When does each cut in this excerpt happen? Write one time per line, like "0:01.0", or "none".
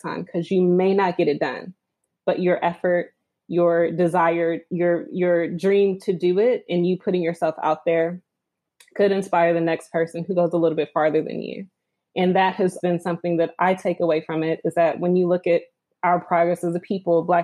0:12.8